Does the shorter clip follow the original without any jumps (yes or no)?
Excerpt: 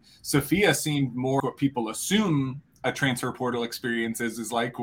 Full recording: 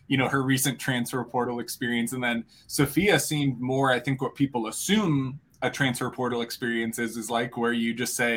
no